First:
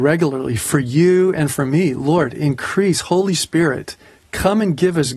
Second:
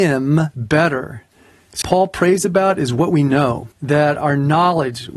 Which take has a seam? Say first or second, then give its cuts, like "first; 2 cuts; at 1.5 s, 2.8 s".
second; 2 cuts; at 1.8 s, 3.7 s